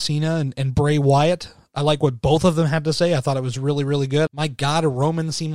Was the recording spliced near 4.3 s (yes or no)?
yes